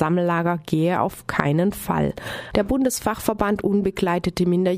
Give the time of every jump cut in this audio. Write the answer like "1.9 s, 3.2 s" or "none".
2.5 s